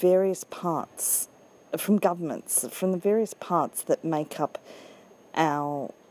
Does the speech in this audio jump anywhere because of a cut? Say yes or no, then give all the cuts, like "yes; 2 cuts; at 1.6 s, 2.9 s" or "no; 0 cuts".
no; 0 cuts